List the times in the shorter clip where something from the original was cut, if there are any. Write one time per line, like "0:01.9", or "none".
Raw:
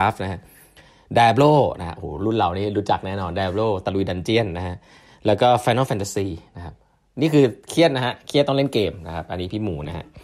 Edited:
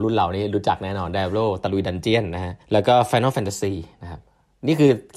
0:02.6